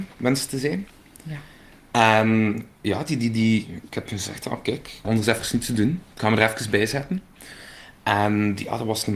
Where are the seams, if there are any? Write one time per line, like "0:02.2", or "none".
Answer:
0:05.0